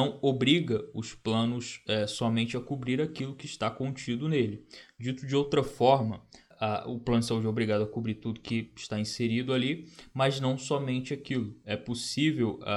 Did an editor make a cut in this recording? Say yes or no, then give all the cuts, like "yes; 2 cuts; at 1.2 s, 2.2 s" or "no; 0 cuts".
no; 0 cuts